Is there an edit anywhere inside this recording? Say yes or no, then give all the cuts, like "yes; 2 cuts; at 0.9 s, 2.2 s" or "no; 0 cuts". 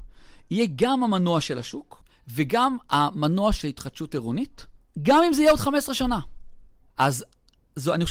yes; 1 cut; at 6.9 s